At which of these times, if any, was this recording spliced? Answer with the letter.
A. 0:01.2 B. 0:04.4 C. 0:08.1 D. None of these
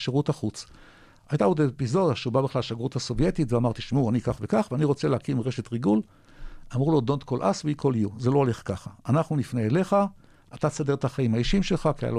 B